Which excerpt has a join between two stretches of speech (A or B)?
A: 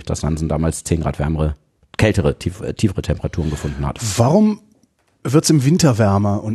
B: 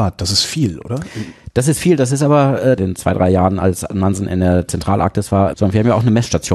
B